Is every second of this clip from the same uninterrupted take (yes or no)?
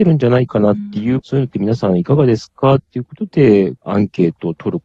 no